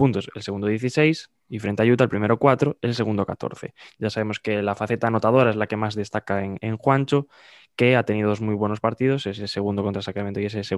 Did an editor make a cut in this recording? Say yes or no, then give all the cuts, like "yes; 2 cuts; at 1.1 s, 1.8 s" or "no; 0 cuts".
no; 0 cuts